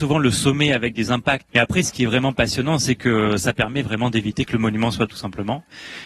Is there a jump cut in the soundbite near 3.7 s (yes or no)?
no